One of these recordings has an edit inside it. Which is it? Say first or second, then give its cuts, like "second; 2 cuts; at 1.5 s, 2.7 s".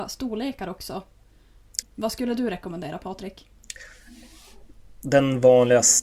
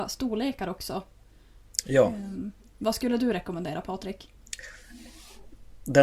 first; 1 cut; at 1.8 s